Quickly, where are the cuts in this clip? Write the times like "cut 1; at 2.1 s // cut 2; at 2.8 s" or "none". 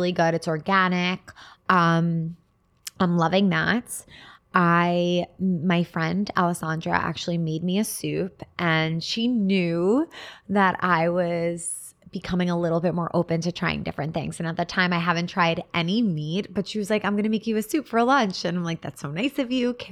none